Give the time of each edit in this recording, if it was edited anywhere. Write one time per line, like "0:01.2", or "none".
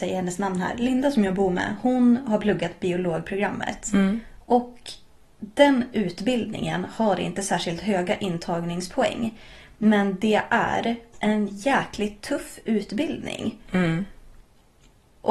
0:11.1